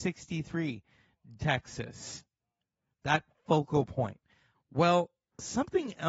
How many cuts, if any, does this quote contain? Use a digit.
2